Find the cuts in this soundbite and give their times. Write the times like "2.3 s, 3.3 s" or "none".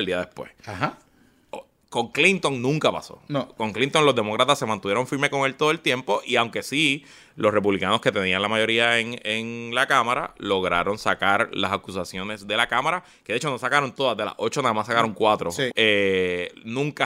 15.7 s